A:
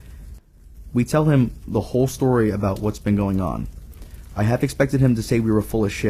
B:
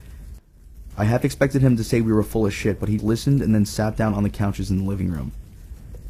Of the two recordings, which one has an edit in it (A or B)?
B